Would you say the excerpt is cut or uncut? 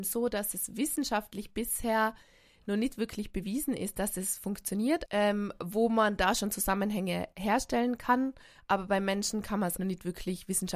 cut